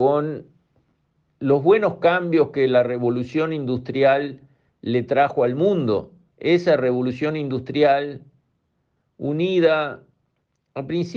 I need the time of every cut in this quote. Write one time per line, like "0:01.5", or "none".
0:06.3